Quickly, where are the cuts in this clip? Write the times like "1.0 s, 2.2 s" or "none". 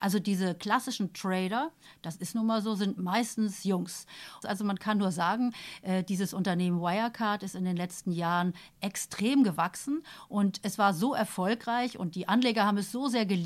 4.4 s